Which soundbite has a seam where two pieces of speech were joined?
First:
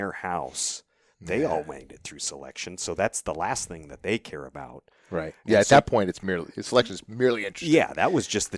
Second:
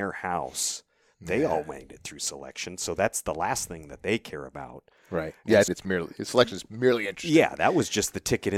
second; 1 cut; at 5.7 s

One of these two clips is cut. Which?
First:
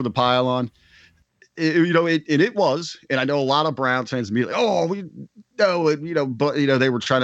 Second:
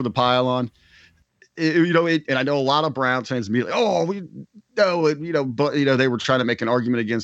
second; 1 cut; at 2.2 s

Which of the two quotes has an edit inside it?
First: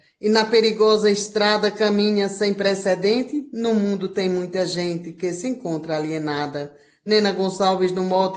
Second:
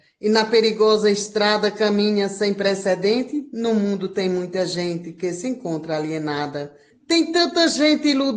second; 1 cut; at 6.9 s

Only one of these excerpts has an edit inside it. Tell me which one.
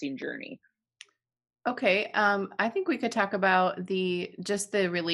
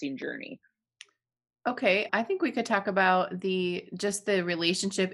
second; 1 cut; at 2.1 s

